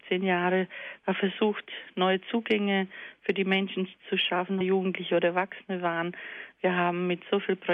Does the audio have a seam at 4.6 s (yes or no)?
yes